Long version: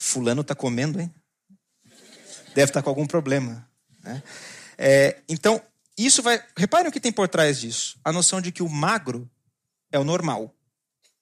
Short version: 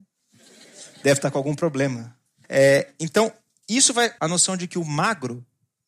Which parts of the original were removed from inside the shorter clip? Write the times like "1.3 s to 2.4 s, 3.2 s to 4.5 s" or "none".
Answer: 4.0 s to 4.7 s, 6.5 s to 8.0 s